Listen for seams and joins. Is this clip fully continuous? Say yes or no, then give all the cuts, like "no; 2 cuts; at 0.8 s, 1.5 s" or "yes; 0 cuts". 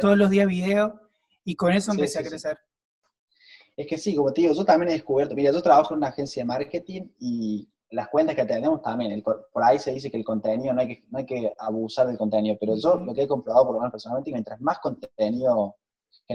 yes; 0 cuts